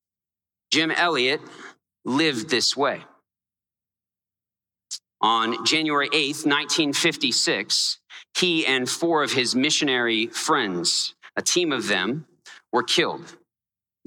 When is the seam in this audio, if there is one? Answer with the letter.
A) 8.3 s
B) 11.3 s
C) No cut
C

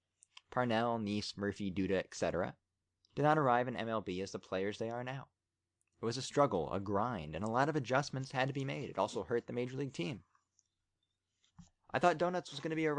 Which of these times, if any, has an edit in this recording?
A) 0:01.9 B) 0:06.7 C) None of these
C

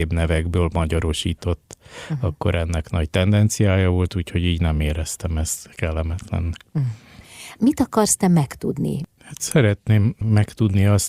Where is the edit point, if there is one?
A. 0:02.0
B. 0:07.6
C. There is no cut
B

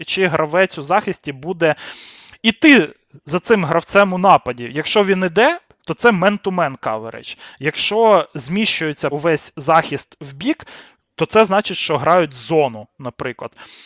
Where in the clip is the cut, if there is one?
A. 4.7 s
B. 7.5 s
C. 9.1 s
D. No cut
C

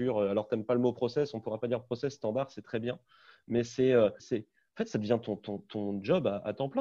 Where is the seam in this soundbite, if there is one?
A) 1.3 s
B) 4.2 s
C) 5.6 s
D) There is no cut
B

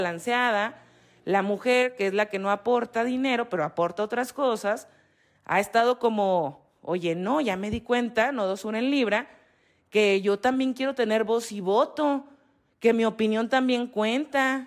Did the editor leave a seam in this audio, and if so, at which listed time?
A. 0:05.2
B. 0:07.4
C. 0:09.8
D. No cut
D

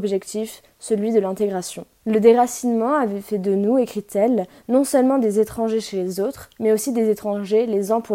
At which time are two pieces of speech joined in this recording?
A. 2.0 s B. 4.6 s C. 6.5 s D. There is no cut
A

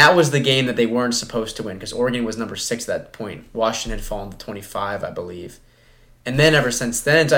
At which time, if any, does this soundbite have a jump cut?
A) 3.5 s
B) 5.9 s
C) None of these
C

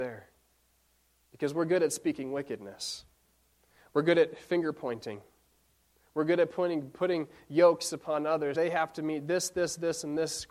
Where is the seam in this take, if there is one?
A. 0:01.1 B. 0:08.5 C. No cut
B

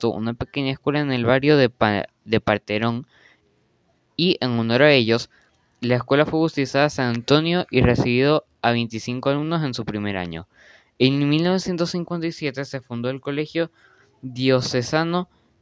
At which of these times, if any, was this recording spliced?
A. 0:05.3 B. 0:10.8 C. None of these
C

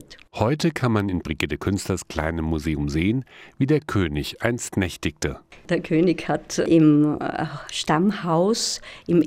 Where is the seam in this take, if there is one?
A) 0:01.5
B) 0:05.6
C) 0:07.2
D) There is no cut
D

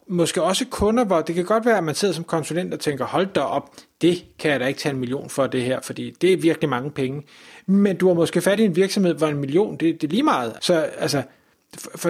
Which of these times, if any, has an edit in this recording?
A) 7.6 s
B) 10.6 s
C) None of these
B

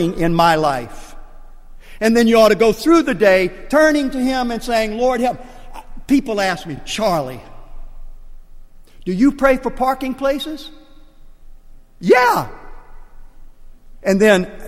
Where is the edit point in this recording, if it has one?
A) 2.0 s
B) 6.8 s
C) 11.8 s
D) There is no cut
D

